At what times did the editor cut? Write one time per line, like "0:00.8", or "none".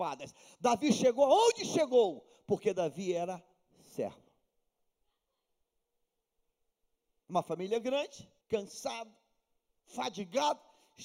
0:08.4